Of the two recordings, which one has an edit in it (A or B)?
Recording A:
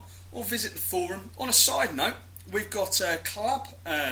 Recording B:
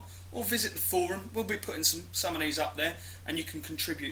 A